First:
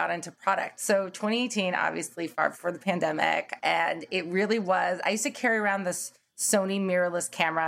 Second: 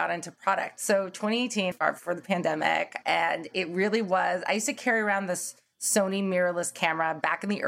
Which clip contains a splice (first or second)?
second